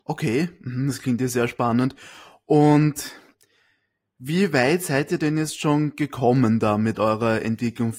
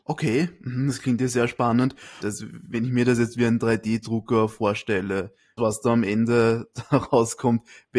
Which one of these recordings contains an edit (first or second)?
second